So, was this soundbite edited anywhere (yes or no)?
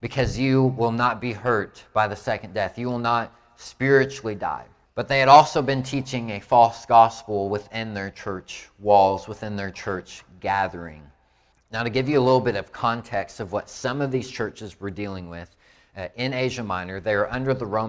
yes